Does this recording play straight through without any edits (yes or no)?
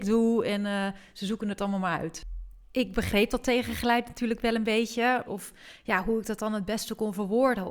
no